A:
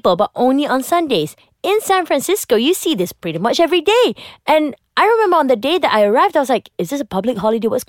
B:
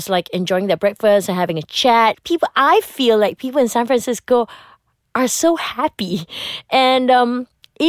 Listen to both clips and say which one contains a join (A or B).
B